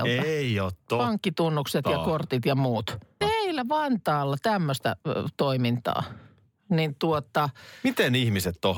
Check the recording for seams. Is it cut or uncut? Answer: cut